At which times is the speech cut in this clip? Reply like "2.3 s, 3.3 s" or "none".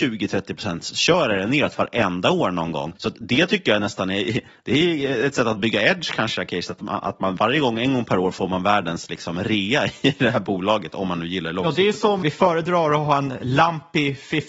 2.9 s, 12.2 s